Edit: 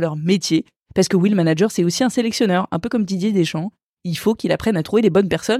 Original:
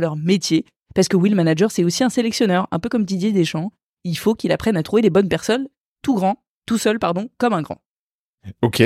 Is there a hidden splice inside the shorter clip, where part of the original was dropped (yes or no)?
no